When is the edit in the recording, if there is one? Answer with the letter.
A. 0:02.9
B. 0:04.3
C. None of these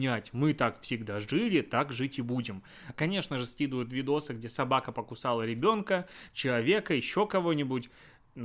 A